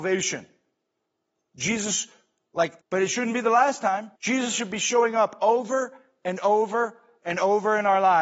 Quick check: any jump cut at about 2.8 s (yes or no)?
yes